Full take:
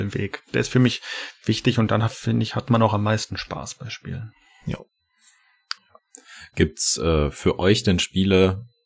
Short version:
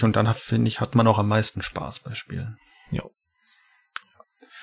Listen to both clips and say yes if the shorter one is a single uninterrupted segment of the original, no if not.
yes